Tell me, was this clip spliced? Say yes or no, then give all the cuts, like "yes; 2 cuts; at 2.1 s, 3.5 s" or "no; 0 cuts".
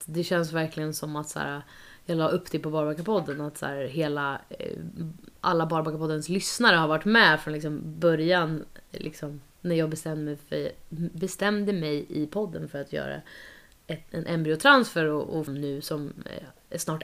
yes; 1 cut; at 15.5 s